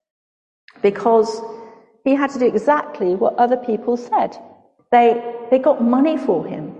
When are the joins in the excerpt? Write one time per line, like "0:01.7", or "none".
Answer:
0:04.8